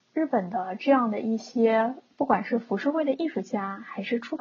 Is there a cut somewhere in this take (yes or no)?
no